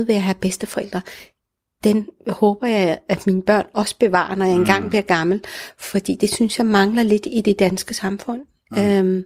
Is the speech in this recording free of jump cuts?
yes; 0 cuts

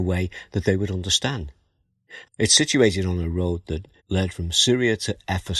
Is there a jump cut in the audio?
yes; 2 cuts; at 2.2 s, 4.0 s

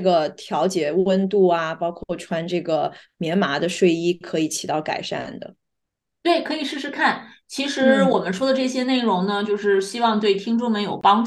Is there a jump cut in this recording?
no; 0 cuts

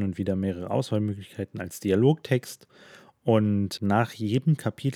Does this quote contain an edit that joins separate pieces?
yes; 1 cut; at 3.8 s

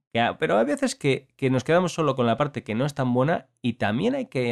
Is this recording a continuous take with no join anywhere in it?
yes; 0 cuts

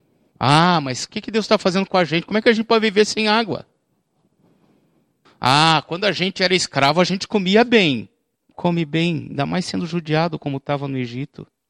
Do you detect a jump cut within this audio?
yes; 2 cuts; at 5.3 s, 8.4 s

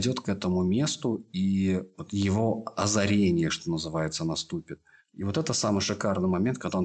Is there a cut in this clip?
no; 0 cuts

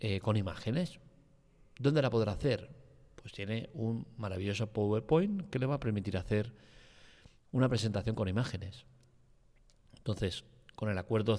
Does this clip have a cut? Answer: no; 0 cuts

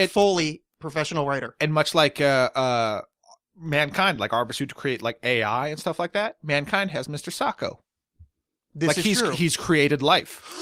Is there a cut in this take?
no; 0 cuts

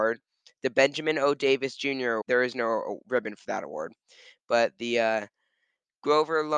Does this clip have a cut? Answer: yes; 1 cut; at 2.2 s

